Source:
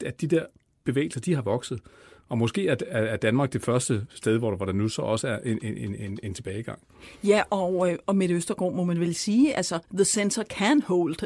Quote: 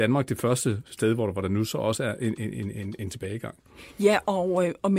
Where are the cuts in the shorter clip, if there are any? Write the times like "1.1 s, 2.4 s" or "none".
none